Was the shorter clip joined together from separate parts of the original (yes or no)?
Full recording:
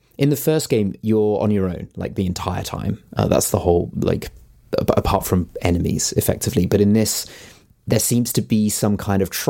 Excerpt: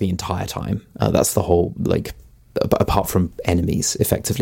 no